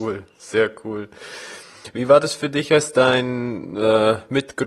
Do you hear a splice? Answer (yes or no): no